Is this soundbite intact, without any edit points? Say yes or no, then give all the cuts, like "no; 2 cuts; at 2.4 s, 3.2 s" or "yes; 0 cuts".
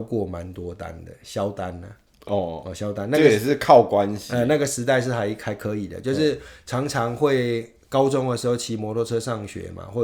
yes; 0 cuts